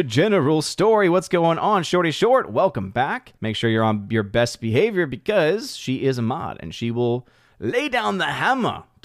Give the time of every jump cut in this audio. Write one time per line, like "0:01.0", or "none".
0:03.4